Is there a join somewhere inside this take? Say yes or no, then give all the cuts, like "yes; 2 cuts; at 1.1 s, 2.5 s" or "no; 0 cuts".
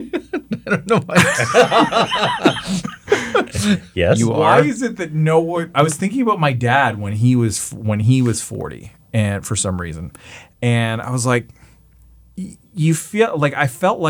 no; 0 cuts